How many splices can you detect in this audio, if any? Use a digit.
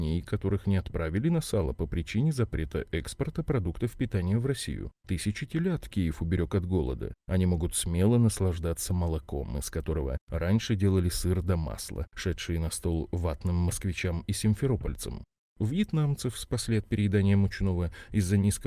0